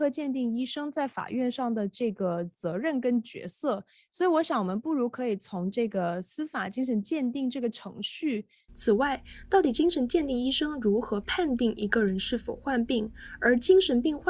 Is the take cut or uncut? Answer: cut